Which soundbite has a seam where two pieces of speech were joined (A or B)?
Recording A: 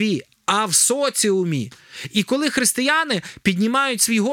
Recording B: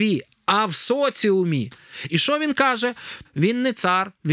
B